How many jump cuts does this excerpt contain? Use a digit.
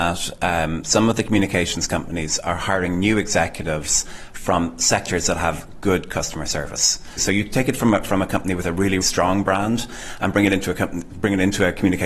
2